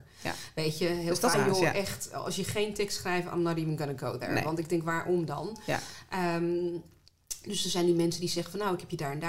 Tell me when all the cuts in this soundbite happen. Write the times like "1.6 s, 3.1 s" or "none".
1.3 s